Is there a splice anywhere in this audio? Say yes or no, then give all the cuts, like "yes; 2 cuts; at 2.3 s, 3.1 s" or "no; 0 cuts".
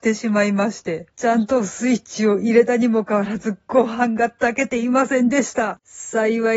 yes; 2 cuts; at 1.1 s, 3.1 s